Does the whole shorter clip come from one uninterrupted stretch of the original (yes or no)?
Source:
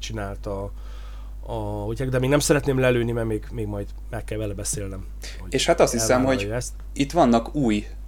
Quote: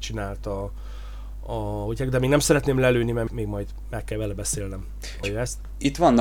no